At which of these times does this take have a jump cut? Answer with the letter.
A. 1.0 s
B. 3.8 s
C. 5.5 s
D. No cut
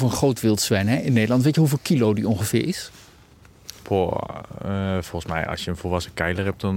D